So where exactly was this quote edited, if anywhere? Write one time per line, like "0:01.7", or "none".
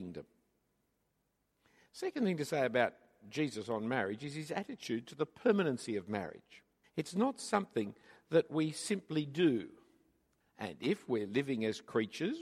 0:06.8
0:10.4